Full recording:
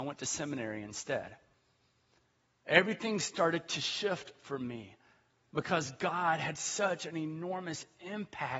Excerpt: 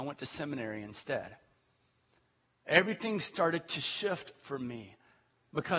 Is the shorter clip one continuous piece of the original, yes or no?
yes